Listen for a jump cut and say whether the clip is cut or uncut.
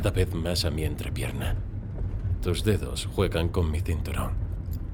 uncut